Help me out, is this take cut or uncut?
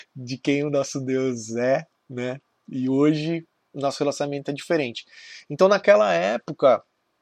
uncut